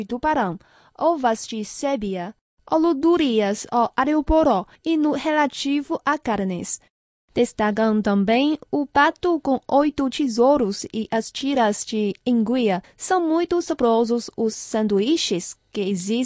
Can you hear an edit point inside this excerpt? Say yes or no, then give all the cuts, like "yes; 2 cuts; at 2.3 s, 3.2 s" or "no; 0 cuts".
no; 0 cuts